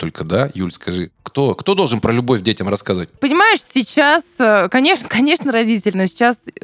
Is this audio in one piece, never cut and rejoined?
no; 1 cut; at 3.2 s

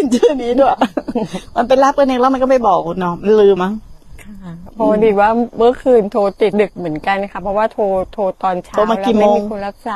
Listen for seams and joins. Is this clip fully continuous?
no; 2 cuts; at 3.6 s, 6.5 s

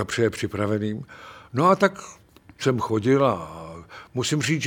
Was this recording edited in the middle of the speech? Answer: yes; 1 cut; at 2.6 s

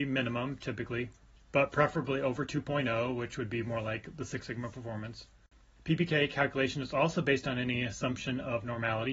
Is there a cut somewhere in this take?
no; 0 cuts

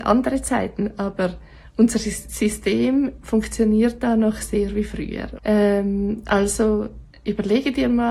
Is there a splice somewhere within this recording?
yes; 1 cut; at 5.4 s

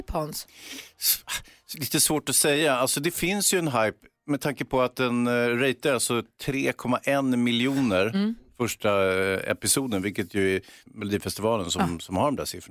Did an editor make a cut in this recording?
yes; 1 cut; at 10.9 s

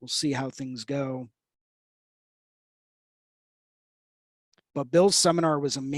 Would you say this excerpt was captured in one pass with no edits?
yes; 0 cuts

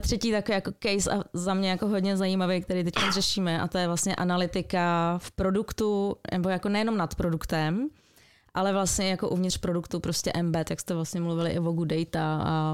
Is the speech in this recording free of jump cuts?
yes; 0 cuts

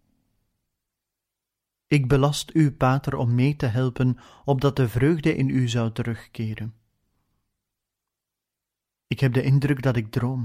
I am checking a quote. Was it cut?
no; 0 cuts

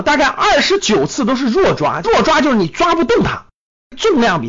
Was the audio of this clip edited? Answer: no; 0 cuts

